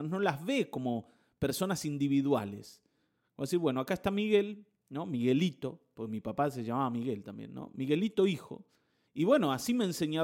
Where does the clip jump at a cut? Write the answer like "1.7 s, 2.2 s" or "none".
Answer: 9.0 s